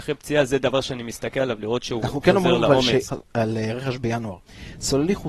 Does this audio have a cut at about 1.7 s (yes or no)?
no